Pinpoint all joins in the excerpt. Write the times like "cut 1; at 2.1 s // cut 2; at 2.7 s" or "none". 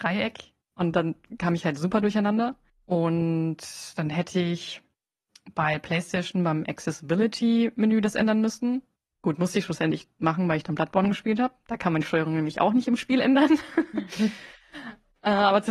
none